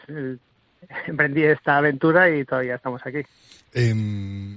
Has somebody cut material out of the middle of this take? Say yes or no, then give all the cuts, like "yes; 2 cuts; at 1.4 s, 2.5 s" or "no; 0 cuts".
no; 0 cuts